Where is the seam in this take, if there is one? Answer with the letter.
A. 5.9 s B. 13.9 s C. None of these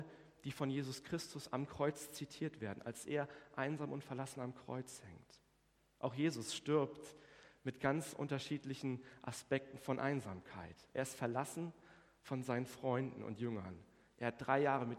C